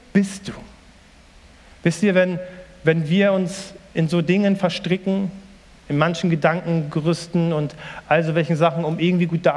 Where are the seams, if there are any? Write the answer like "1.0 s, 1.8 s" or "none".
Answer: none